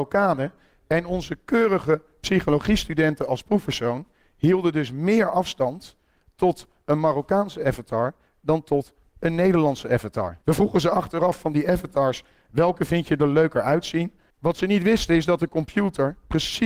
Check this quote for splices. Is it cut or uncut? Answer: cut